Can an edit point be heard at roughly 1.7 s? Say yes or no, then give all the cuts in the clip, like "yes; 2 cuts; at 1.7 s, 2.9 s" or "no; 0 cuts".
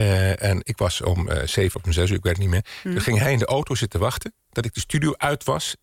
yes; 1 cut; at 1.7 s